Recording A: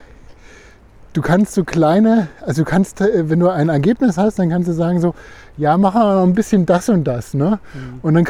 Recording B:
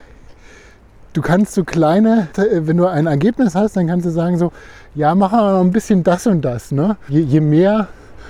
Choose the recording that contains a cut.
B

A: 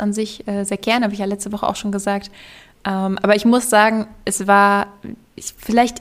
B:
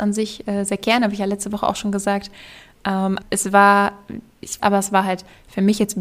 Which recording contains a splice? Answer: B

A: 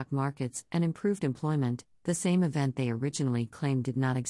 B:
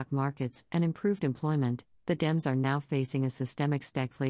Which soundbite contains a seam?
A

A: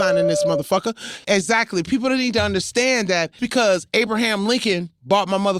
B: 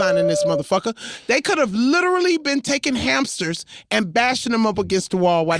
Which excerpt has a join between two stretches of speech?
A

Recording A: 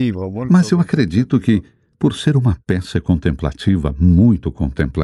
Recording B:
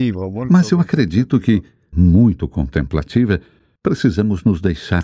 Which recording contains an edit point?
B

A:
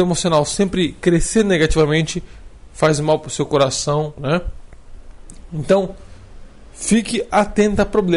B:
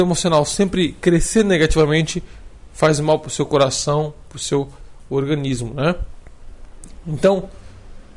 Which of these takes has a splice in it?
A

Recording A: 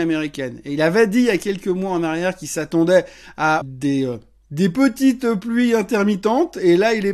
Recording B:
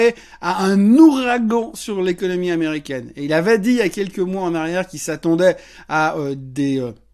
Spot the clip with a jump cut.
A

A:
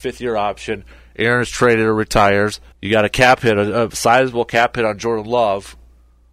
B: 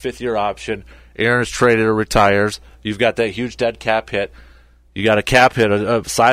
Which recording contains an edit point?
A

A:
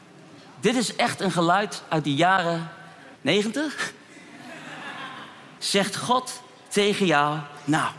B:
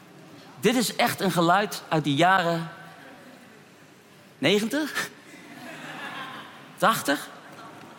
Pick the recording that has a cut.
A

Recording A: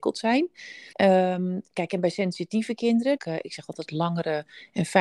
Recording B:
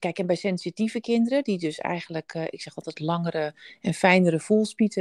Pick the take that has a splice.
A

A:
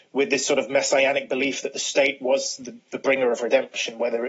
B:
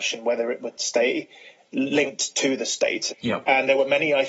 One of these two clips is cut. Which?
B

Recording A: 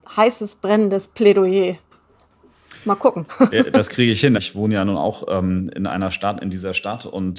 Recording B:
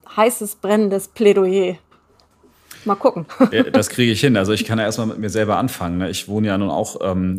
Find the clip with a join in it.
A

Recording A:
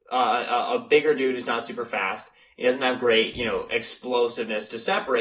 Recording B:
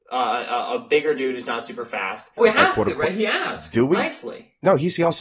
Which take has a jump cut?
B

